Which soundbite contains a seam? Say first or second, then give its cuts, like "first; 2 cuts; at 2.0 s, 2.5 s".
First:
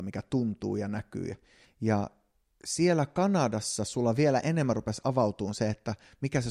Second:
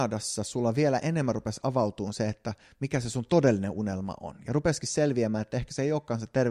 first; 1 cut; at 1.6 s